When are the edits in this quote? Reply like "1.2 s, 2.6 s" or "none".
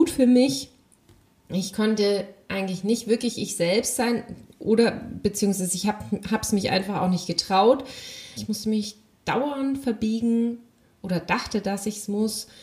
8.4 s